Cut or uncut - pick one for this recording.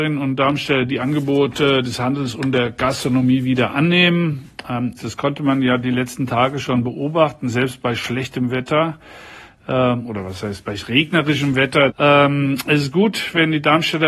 cut